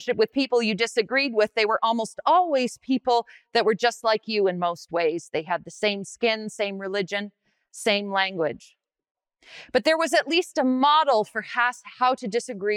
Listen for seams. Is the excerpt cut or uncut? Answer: uncut